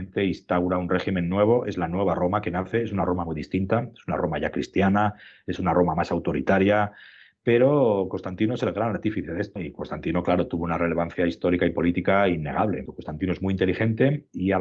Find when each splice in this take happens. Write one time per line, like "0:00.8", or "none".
0:09.6
0:12.9